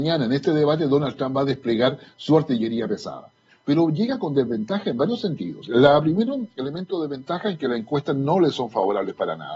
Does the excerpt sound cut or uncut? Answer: uncut